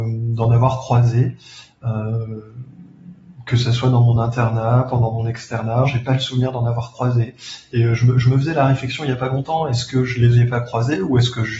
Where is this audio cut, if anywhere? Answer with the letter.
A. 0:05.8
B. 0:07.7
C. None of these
A